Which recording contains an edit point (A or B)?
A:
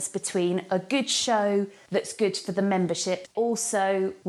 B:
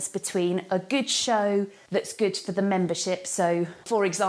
A